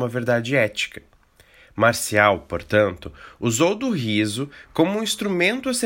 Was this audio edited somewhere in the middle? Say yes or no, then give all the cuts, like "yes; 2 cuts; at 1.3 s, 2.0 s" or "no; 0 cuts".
no; 0 cuts